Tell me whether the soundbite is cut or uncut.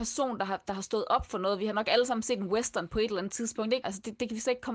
cut